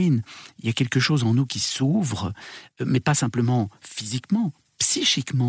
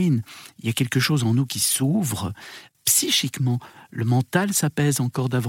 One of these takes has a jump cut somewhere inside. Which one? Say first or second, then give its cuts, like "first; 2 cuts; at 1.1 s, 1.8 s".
second; 1 cut; at 2.7 s